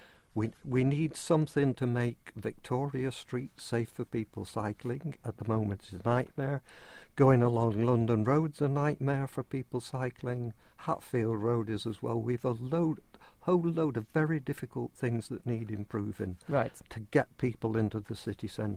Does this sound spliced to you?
no; 0 cuts

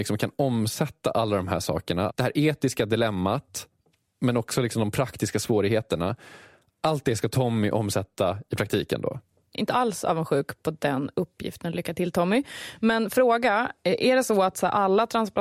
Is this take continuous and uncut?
yes; 0 cuts

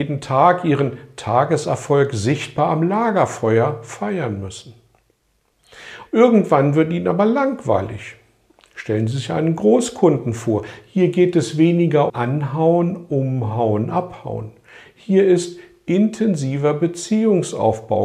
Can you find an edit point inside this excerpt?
yes; 2 cuts; at 6.1 s, 12.1 s

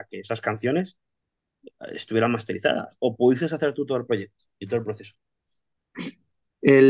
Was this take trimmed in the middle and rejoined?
no; 0 cuts

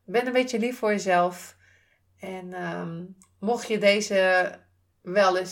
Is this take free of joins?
yes; 0 cuts

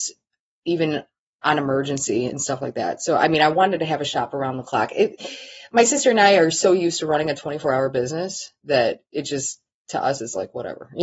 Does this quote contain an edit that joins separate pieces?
no; 0 cuts

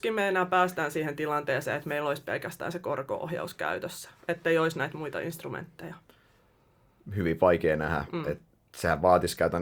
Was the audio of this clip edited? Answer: no; 0 cuts

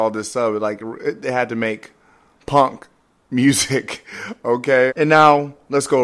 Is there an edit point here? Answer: yes; 1 cut; at 4.9 s

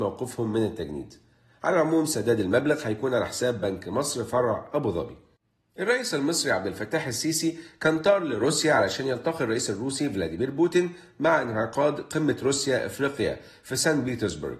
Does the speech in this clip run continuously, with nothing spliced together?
yes; 0 cuts

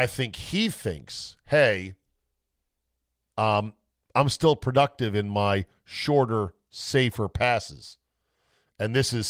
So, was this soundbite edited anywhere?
no; 0 cuts

